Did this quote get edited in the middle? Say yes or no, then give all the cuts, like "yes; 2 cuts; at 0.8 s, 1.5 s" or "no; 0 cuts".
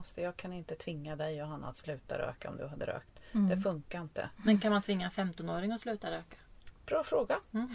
no; 0 cuts